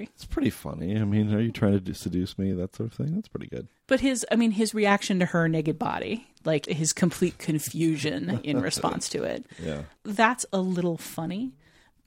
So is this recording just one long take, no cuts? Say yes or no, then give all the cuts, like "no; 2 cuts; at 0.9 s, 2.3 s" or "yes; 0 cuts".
yes; 0 cuts